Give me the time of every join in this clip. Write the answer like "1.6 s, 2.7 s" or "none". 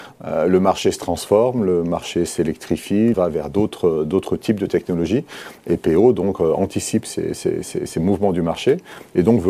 3.1 s